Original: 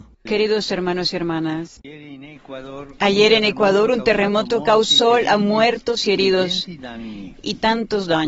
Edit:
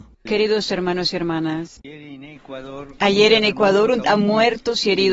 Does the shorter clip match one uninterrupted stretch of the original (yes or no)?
no